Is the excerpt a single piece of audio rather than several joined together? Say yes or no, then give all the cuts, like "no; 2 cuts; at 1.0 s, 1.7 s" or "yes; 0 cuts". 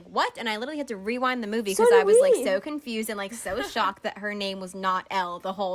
yes; 0 cuts